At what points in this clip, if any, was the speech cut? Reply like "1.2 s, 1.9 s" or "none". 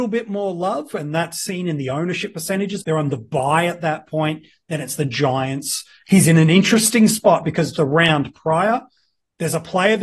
2.8 s, 6.1 s, 7.7 s

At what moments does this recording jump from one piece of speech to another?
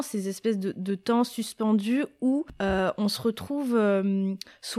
none

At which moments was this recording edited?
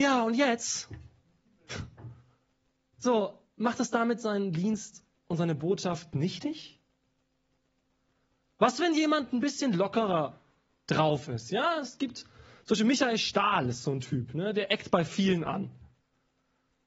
none

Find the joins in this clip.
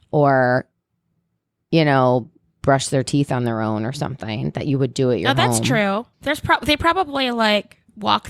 2.6 s, 6.1 s

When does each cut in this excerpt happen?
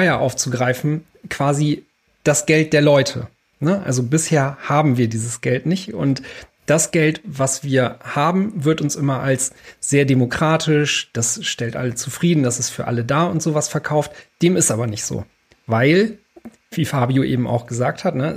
none

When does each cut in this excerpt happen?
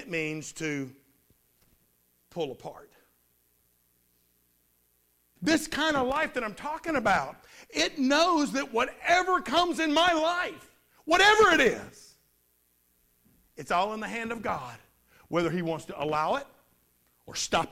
5.4 s

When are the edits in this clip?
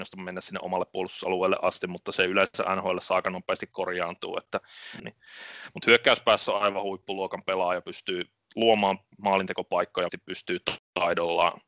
5.0 s, 7.8 s, 10.1 s

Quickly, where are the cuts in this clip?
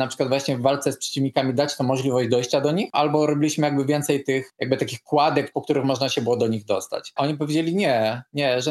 2.9 s, 5.5 s, 7.2 s

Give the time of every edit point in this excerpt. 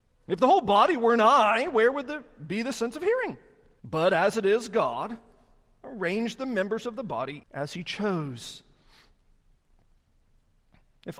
3.8 s, 7.4 s

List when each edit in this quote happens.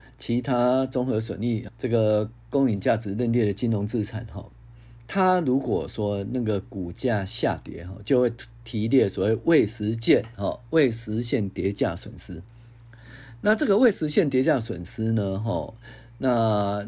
1.7 s

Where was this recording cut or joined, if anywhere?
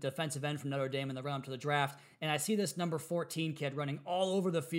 none

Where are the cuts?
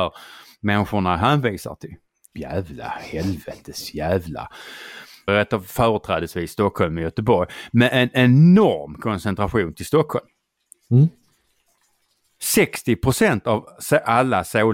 2.3 s, 5.3 s

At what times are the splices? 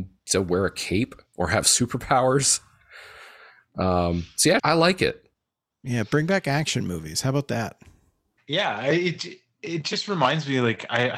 4.6 s

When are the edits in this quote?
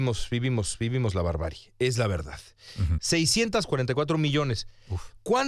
3.0 s

